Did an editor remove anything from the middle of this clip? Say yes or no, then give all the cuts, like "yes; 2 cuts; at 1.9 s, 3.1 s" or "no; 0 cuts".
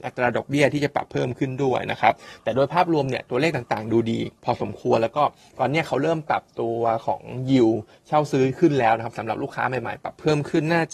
yes; 1 cut; at 4.4 s